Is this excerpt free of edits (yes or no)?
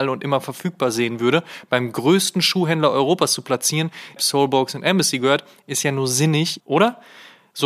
no